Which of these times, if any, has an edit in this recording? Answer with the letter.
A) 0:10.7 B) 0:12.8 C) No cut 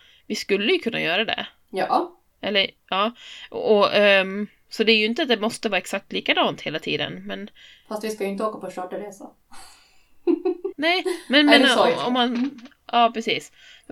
A